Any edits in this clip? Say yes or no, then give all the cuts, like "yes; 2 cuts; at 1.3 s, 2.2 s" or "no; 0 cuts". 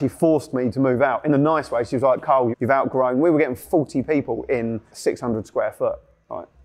yes; 2 cuts; at 2.5 s, 4.9 s